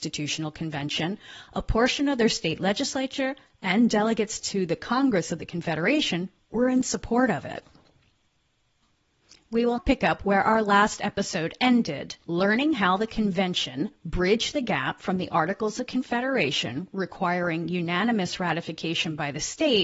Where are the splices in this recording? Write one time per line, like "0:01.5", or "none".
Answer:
0:09.8
0:12.2